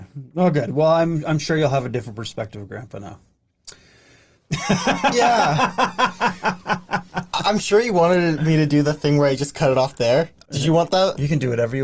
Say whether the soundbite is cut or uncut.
cut